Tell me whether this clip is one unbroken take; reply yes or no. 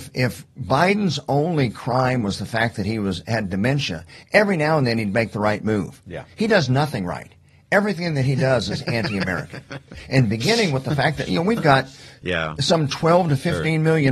yes